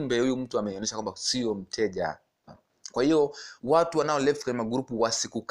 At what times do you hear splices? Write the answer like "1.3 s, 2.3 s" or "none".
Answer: 2.5 s, 3.6 s